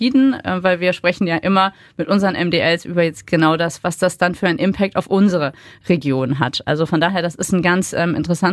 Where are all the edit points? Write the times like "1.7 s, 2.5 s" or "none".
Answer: none